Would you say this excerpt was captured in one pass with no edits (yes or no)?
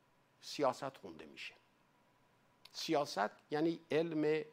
yes